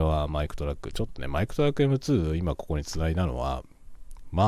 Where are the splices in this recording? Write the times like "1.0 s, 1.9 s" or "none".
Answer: none